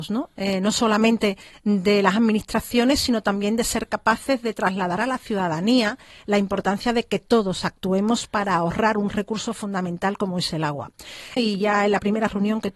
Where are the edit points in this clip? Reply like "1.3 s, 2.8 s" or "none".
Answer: 11.4 s